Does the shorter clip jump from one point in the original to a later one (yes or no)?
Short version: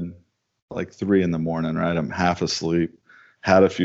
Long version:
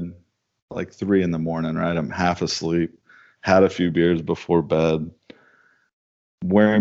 no